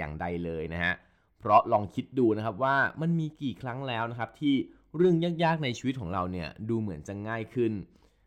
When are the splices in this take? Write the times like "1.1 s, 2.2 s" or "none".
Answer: none